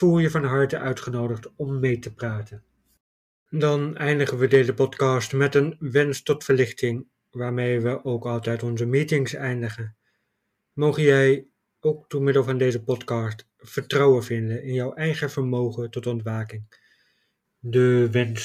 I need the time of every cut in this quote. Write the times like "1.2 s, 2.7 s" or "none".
17.4 s